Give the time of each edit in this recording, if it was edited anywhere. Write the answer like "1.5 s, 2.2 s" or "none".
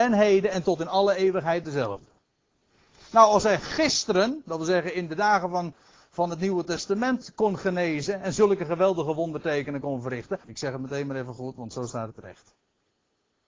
10.4 s